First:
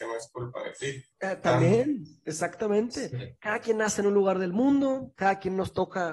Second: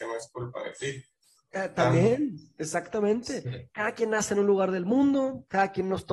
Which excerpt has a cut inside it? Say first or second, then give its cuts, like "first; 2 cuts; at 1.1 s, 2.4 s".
first; 1 cut; at 1.1 s